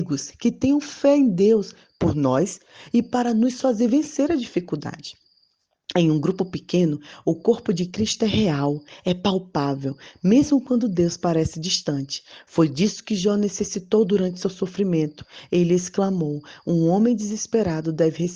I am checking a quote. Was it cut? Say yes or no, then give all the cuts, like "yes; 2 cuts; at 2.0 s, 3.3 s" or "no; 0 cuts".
no; 0 cuts